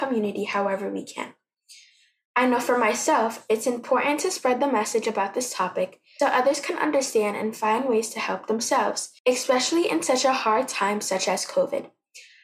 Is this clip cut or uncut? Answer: cut